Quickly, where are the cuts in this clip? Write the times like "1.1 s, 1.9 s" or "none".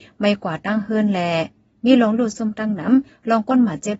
none